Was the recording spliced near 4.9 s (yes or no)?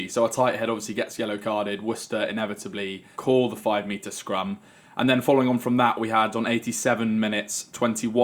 no